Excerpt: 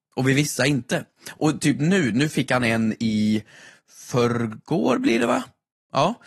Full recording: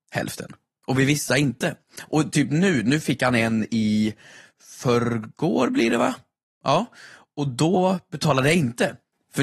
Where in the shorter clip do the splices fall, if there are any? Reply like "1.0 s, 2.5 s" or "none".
none